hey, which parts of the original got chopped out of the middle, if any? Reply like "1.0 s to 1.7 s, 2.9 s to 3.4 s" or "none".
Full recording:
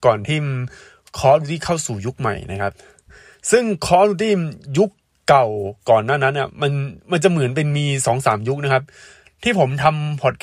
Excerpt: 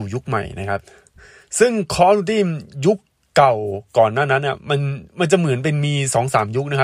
none